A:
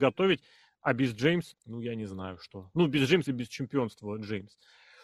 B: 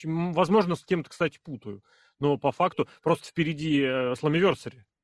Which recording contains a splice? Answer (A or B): A